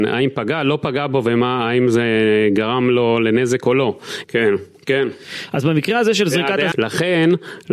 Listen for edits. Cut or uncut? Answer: cut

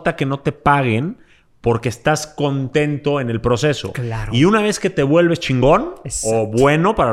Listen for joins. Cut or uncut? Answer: uncut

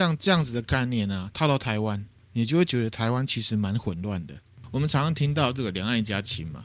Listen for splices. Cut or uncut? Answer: uncut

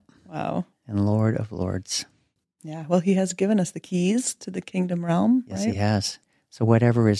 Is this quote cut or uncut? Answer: uncut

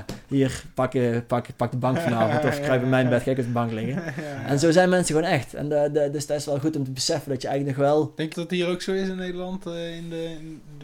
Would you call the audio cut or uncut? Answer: cut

